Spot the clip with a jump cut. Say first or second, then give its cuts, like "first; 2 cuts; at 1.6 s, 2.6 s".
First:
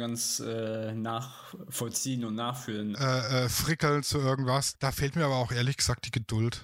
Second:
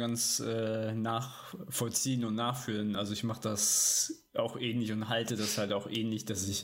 first; 2 cuts; at 2.9 s, 4.7 s